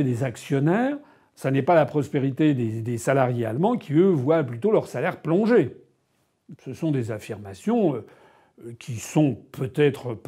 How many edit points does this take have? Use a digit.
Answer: 1